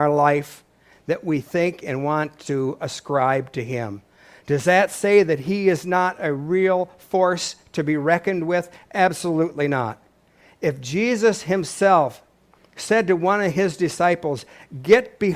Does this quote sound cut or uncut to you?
uncut